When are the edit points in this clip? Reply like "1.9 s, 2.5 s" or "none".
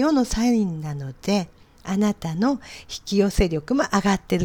none